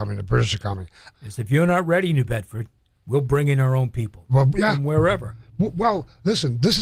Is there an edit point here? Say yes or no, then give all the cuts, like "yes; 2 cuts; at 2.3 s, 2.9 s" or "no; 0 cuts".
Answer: yes; 1 cut; at 1.1 s